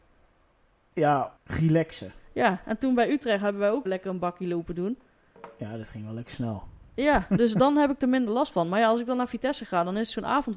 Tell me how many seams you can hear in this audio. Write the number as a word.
two